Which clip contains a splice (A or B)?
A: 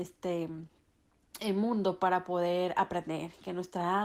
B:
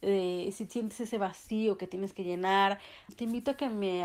B